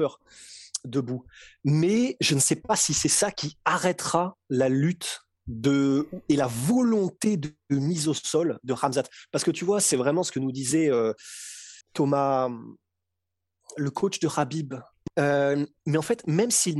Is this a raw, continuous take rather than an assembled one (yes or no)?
no